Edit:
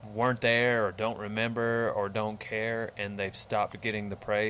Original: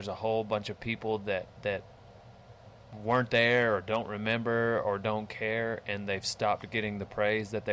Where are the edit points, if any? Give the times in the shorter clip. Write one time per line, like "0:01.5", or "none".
none